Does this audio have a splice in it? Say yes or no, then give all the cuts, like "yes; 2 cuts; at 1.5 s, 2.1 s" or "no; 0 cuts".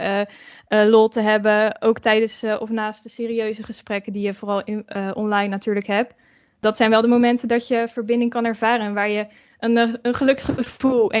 no; 0 cuts